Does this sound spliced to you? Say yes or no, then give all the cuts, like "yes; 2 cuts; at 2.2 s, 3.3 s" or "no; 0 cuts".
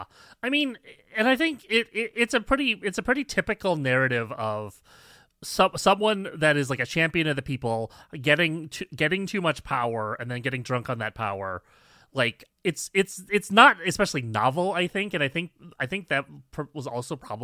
yes; 1 cut; at 12.5 s